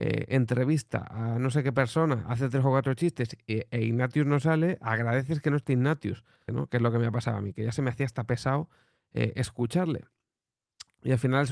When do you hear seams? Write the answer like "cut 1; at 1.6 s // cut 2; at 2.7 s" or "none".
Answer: cut 1; at 6.5 s